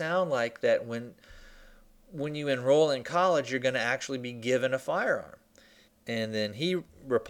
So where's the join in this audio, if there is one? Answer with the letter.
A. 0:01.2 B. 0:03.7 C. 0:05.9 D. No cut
C